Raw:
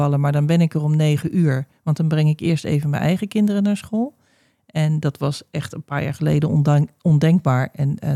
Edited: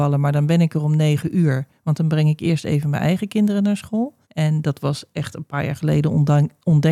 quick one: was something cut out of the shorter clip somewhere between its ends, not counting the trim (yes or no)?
yes